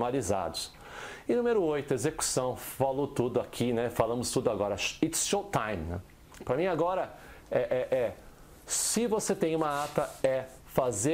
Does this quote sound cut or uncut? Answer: uncut